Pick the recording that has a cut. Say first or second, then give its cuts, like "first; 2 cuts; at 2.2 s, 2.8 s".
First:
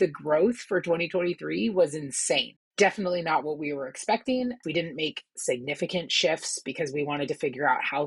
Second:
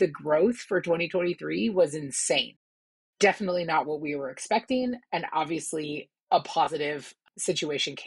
first; 2 cuts; at 2.7 s, 4.6 s